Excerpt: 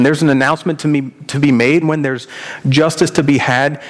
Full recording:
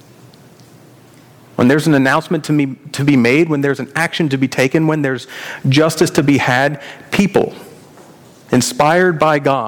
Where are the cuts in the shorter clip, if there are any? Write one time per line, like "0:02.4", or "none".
0:01.8